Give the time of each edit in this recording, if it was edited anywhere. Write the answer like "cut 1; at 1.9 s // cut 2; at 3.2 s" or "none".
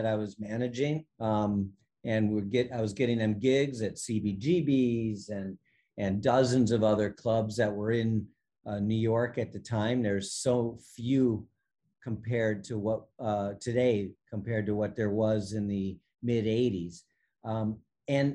cut 1; at 1.1 s